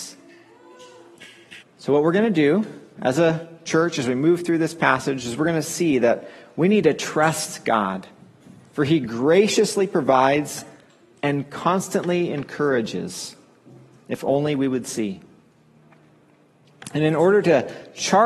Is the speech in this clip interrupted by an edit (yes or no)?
yes